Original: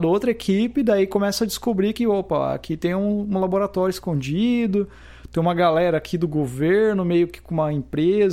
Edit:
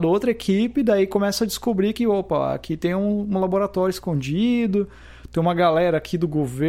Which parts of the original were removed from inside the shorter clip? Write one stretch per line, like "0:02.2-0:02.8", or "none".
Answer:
none